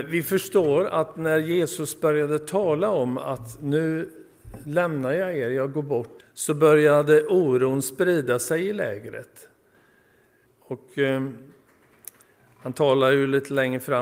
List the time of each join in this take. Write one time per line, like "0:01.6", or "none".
0:06.2
0:10.4